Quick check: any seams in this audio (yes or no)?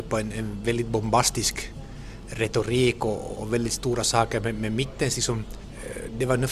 yes